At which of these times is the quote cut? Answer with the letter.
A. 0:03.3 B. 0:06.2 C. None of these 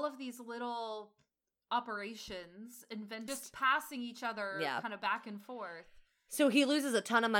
A